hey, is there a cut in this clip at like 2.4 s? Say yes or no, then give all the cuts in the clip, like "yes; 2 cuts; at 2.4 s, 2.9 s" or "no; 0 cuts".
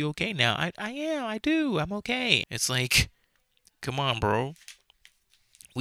yes; 1 cut; at 2.4 s